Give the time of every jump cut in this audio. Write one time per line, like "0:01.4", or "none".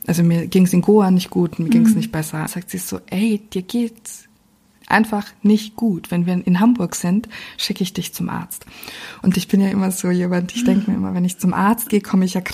0:02.5